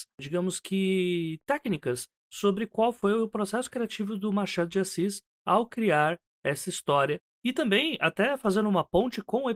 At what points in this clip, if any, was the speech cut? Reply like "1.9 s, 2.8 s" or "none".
7.3 s